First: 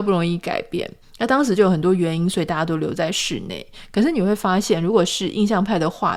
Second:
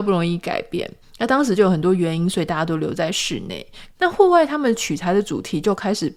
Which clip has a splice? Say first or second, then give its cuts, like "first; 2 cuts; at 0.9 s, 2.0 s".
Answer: second; 1 cut; at 3.9 s